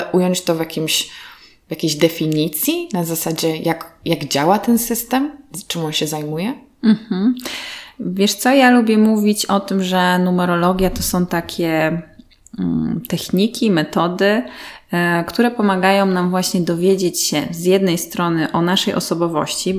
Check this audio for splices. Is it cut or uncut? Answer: uncut